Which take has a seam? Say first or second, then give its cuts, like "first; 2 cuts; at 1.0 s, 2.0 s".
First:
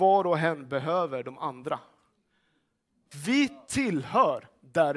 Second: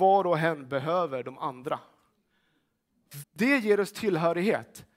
second; 1 cut; at 3.2 s